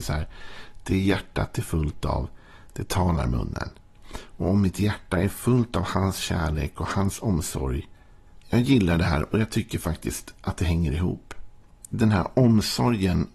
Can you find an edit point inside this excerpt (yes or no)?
yes